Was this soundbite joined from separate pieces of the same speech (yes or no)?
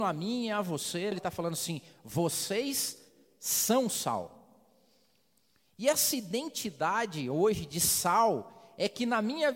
yes